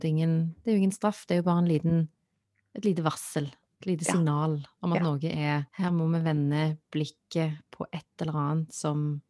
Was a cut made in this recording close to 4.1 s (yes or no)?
no